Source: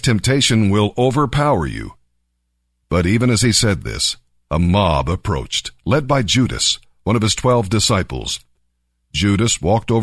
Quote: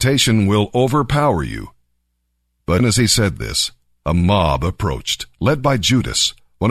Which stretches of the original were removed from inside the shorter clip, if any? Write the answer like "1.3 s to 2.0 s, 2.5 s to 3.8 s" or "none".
3.0 s to 3.2 s